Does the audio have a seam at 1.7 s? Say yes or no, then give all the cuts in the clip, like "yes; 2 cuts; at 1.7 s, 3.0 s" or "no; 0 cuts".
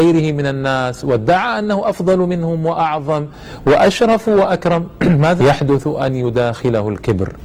no; 1 cut; at 5.4 s